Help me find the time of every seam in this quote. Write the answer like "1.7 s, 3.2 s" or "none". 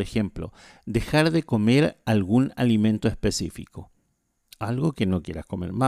none